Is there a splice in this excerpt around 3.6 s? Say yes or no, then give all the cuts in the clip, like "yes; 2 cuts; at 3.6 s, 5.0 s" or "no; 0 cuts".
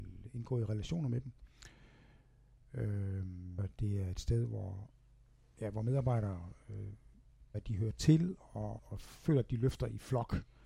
yes; 3 cuts; at 3.6 s, 7.5 s, 8.8 s